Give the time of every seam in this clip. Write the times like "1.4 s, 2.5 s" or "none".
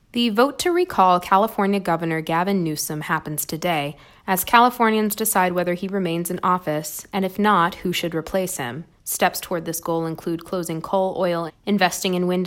9.0 s, 11.5 s